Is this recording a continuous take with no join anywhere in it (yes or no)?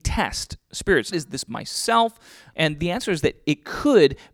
no